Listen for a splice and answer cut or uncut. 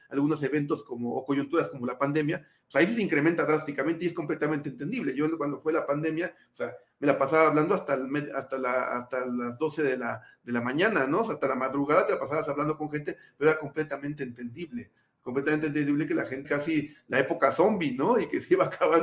cut